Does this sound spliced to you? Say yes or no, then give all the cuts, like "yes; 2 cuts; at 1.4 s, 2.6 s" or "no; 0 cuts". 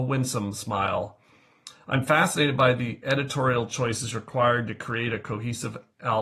no; 0 cuts